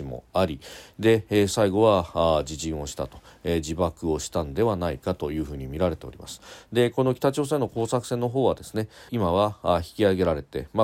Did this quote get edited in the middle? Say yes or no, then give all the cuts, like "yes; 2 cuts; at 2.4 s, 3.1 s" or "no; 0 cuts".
yes; 1 cut; at 9.1 s